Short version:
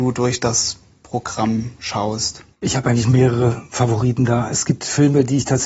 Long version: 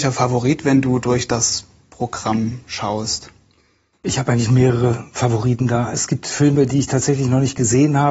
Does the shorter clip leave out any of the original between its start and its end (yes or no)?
yes